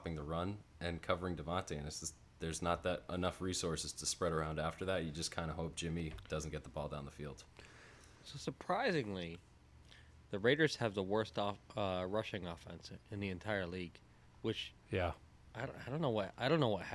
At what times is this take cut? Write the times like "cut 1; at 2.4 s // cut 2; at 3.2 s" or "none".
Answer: none